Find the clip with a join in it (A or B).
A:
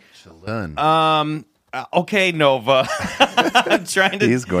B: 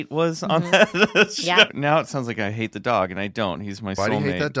B